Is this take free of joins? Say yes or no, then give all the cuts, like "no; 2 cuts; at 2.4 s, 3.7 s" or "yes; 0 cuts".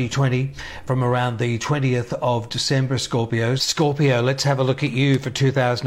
no; 1 cut; at 3.6 s